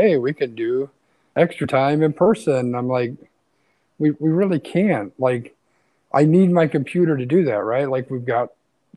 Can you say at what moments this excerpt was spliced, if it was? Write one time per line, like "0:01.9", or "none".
none